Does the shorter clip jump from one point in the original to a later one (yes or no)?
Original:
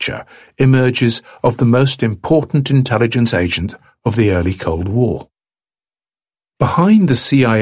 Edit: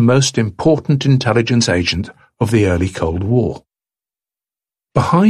no